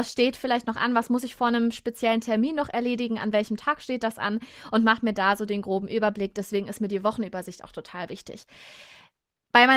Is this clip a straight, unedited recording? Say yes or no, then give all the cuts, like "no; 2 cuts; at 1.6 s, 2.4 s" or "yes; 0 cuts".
yes; 0 cuts